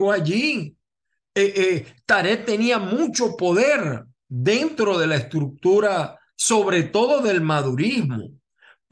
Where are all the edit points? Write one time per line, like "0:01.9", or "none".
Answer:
0:04.2
0:06.3